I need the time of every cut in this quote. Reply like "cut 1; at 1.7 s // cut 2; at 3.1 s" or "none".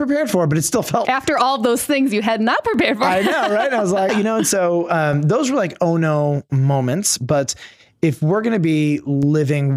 cut 1; at 1.0 s // cut 2; at 4.1 s